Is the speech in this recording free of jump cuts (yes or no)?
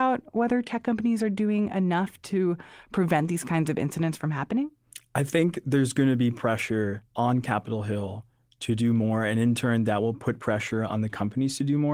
yes